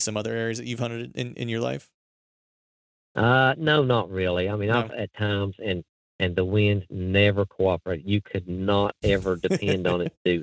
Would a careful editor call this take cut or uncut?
cut